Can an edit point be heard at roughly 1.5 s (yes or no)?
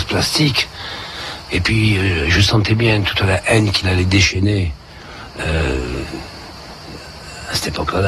yes